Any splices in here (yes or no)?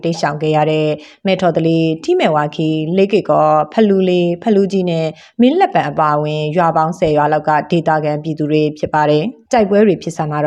yes